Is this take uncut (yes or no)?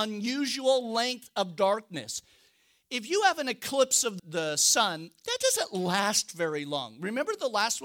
no